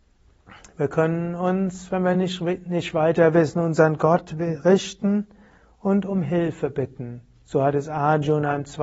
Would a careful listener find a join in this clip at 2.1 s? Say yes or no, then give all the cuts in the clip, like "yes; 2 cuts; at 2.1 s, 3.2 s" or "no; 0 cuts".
no; 0 cuts